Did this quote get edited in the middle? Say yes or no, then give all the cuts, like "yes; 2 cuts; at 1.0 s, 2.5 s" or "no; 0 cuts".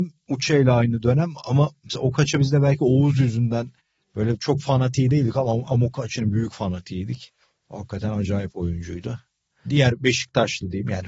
no; 0 cuts